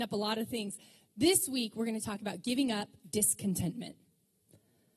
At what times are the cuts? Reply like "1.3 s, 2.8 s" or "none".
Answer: none